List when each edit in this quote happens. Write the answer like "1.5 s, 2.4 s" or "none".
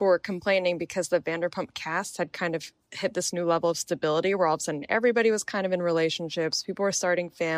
none